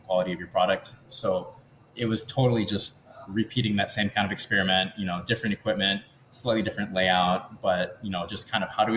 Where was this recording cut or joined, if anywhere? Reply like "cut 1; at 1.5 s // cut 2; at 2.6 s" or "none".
none